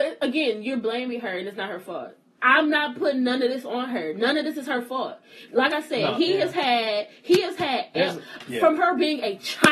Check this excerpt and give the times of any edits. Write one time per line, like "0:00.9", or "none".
none

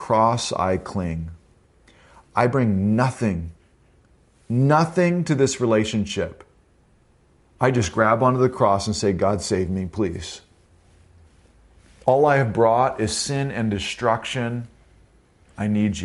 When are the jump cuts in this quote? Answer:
none

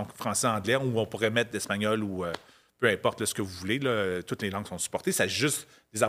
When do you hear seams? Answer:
none

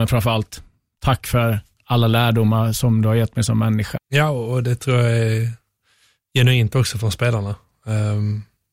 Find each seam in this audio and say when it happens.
0:04.0

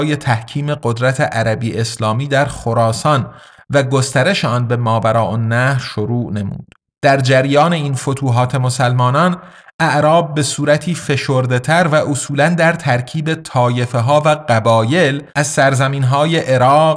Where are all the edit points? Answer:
0:07.0
0:15.3

